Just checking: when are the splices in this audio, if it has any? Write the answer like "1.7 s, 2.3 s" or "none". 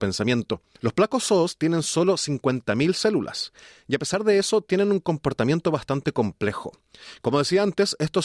none